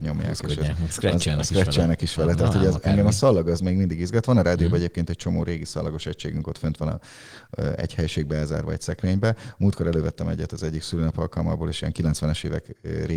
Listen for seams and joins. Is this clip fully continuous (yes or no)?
yes